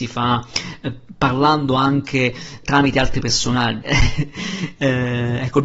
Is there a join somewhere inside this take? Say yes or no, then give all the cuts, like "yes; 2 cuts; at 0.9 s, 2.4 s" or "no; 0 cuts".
yes; 2 cuts; at 2.6 s, 3.8 s